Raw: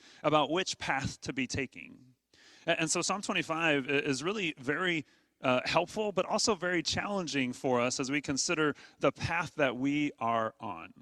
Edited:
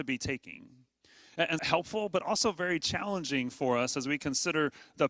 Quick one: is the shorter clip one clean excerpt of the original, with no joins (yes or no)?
no